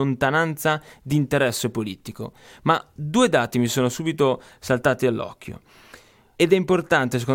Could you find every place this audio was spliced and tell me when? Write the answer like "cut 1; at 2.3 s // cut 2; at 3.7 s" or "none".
cut 1; at 6.3 s